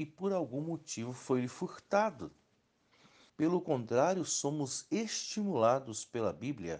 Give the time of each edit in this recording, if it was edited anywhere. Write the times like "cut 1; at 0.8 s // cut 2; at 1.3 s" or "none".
cut 1; at 3.3 s

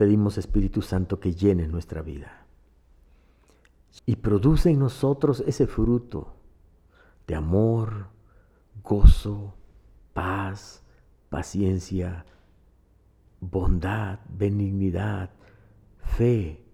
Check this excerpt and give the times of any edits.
cut 1; at 4.0 s

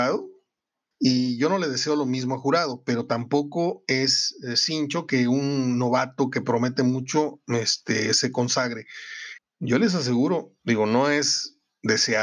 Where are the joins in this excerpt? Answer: cut 1; at 0.9 s // cut 2; at 9.4 s

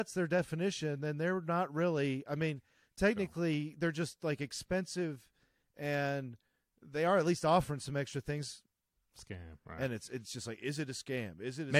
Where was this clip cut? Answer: cut 1; at 9.0 s

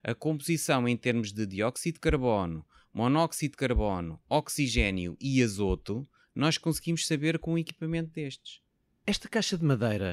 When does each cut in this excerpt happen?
none

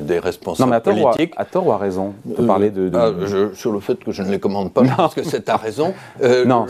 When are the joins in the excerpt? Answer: none

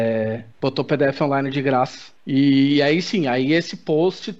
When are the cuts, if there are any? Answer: none

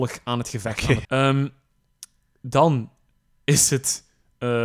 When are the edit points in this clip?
cut 1; at 1.0 s

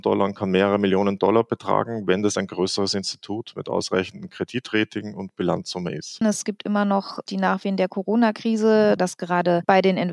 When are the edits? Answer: cut 1; at 6.2 s // cut 2; at 9.0 s

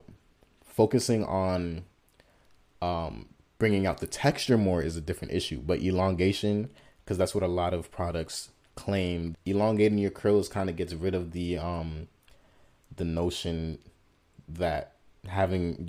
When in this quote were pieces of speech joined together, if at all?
cut 1; at 9.3 s

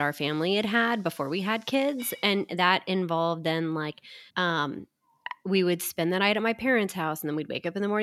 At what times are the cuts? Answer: cut 1; at 4.3 s

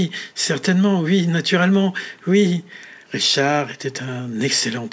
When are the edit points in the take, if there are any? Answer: cut 1; at 3.0 s

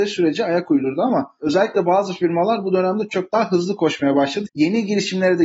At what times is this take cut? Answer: cut 1; at 3.1 s // cut 2; at 4.5 s

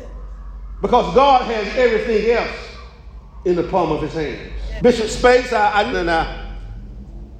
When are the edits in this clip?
cut 1; at 4.8 s // cut 2; at 5.9 s

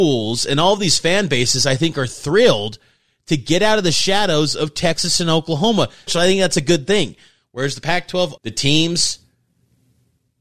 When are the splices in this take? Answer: cut 1; at 6.1 s // cut 2; at 8.4 s

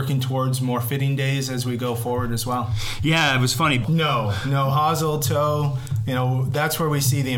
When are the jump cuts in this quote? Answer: cut 1; at 3.8 s

